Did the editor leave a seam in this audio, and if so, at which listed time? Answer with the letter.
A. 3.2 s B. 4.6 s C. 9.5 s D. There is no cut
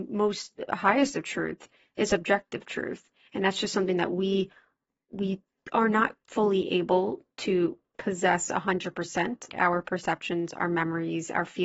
C